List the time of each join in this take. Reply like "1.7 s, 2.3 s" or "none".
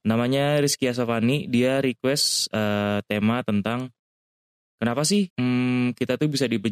5.3 s